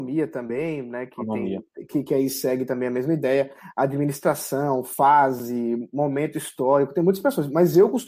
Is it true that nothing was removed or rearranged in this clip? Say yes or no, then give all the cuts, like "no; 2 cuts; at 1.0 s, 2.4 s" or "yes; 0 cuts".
yes; 0 cuts